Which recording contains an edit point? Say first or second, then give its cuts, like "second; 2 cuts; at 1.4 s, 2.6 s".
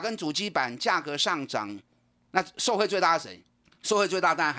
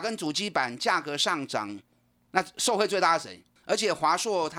second; 1 cut; at 3.6 s